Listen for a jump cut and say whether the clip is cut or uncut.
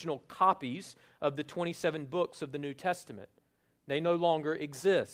uncut